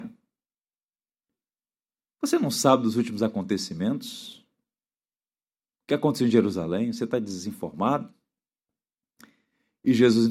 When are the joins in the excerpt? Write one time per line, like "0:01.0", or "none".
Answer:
none